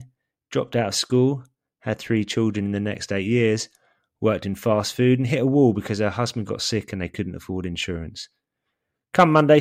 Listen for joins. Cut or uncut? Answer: uncut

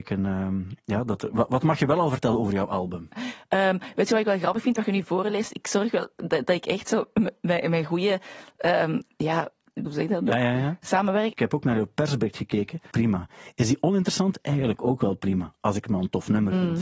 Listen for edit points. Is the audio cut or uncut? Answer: cut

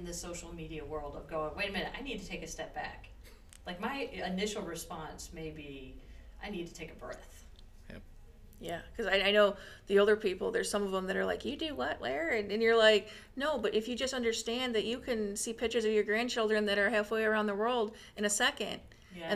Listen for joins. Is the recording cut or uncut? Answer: uncut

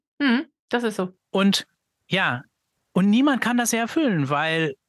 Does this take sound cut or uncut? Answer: uncut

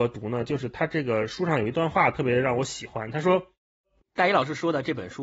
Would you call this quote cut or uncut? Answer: cut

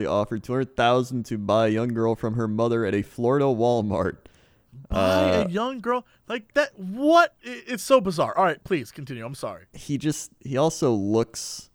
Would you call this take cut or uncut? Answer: cut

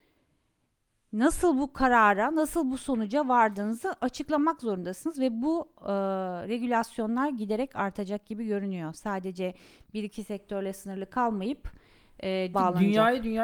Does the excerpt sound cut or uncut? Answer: cut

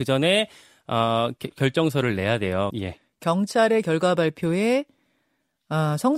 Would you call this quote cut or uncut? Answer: cut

